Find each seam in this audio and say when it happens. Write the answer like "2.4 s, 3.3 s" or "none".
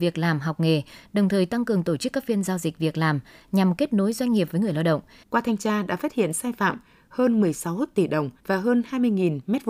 5.2 s, 8.4 s